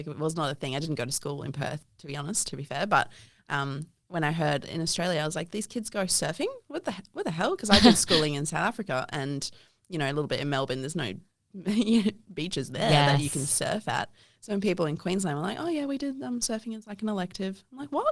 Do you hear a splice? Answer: no; 0 cuts

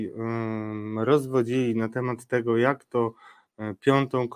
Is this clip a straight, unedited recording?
yes; 0 cuts

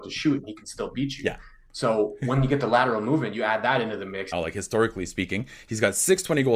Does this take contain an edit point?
yes; 1 cut; at 4.3 s

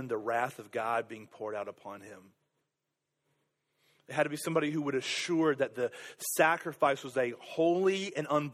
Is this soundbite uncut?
yes; 0 cuts

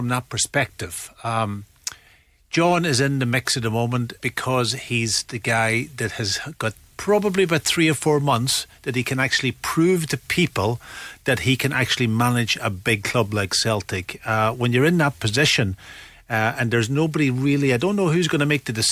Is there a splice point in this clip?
yes; 1 cut; at 4.2 s

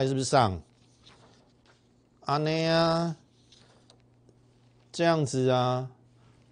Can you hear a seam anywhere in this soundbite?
no; 0 cuts

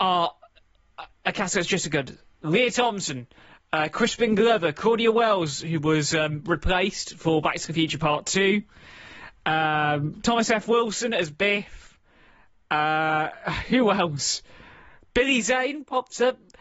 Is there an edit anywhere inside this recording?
no; 0 cuts

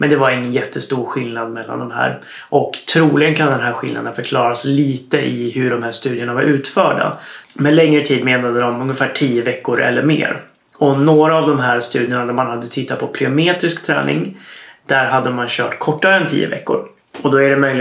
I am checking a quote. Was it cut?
yes; 1 cut; at 7.4 s

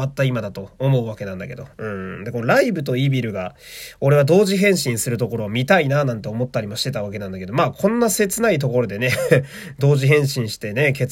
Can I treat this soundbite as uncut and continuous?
yes; 0 cuts

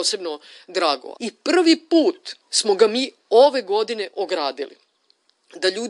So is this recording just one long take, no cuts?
no; 2 cuts; at 1.2 s, 2.4 s

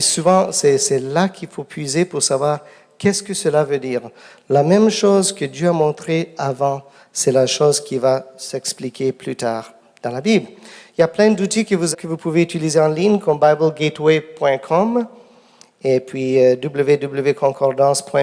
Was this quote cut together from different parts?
yes; 1 cut; at 11.9 s

